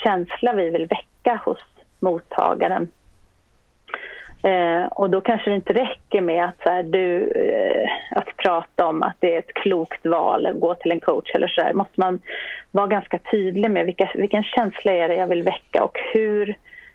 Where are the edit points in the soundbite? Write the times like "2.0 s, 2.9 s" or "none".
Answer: 8.1 s, 11.7 s